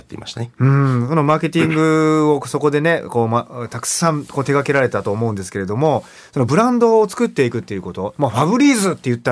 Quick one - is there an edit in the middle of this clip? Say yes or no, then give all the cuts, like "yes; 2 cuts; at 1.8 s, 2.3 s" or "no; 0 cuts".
no; 0 cuts